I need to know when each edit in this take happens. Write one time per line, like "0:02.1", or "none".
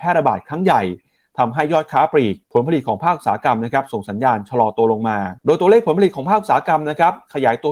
0:02.4
0:05.4